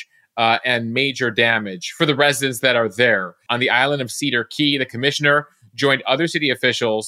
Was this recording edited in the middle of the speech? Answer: yes; 1 cut; at 3.5 s

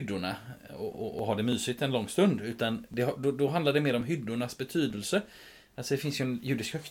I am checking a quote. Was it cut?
no; 0 cuts

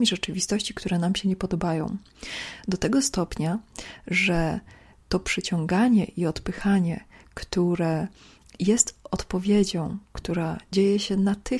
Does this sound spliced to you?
no; 0 cuts

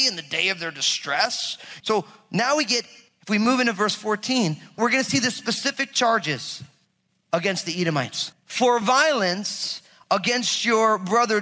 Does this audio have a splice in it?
yes; 2 cuts; at 1.8 s, 8.3 s

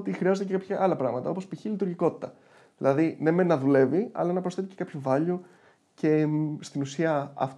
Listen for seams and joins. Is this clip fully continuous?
yes; 0 cuts

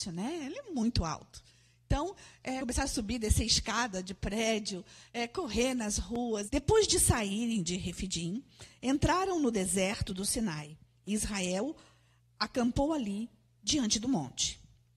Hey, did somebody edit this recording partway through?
yes; 2 cuts; at 2.6 s, 6.5 s

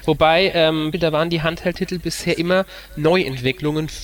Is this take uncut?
no; 1 cut; at 0.9 s

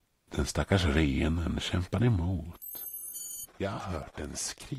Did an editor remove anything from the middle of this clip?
yes; 1 cut; at 3.4 s

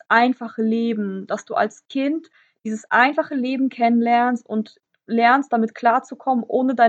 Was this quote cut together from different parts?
no; 0 cuts

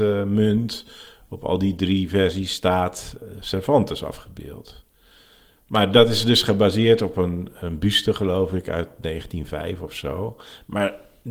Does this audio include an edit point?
no; 0 cuts

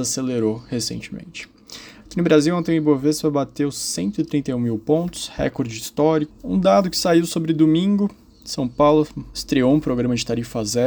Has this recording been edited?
yes; 2 cuts; at 6.3 s, 9.3 s

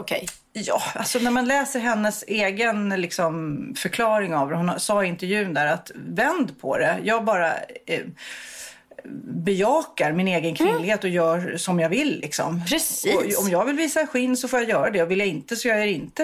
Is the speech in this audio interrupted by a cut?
no; 0 cuts

